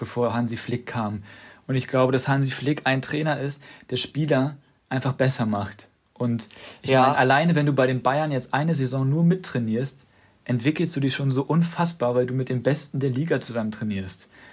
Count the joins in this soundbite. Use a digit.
0